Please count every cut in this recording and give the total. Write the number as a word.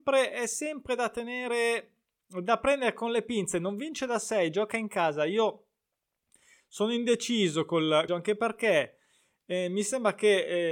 one